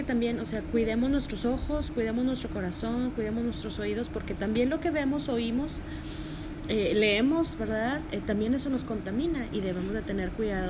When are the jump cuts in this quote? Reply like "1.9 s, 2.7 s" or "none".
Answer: none

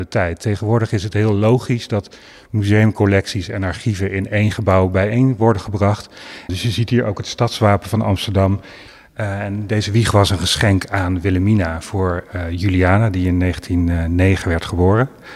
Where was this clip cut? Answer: 6.5 s

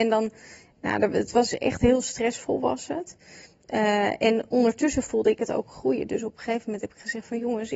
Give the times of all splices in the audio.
none

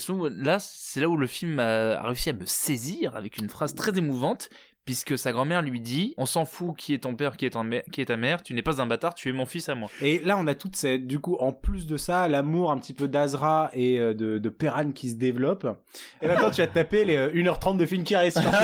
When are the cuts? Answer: 16.2 s

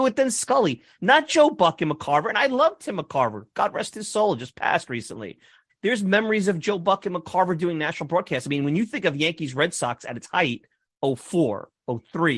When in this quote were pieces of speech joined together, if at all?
5.7 s

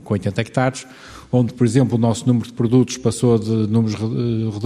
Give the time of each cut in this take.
none

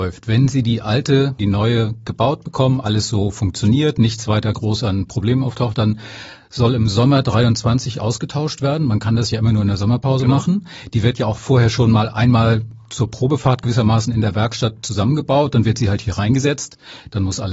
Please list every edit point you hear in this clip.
1.4 s

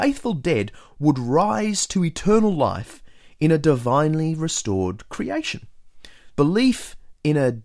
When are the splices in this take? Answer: 6.3 s

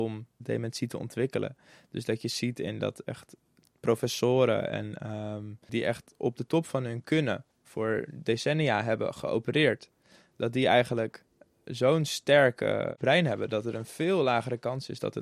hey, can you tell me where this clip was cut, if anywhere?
5.7 s, 7.5 s

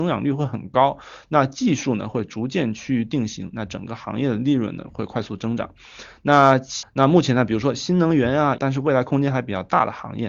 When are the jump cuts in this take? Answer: 6.8 s, 8.6 s

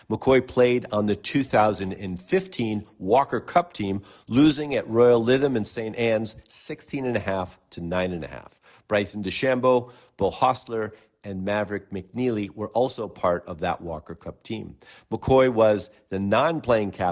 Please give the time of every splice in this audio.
none

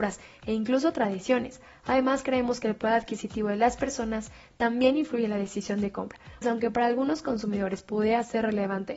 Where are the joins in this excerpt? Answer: 6.4 s

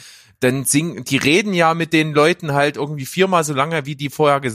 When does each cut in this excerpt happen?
1.0 s

